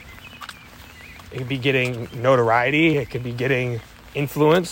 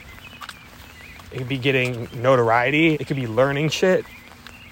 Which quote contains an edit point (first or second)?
second